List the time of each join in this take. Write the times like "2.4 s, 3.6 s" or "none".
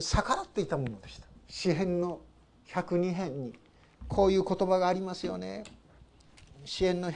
1.3 s